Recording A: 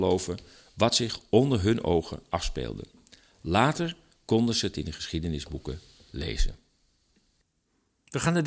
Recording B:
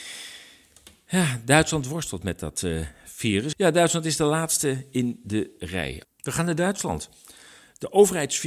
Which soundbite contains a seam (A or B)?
B